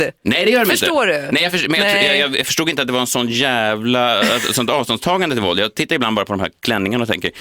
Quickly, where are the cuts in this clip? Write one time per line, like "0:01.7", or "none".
none